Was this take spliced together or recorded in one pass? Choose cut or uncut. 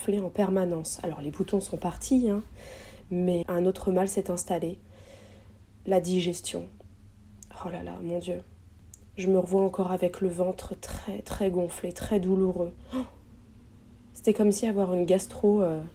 cut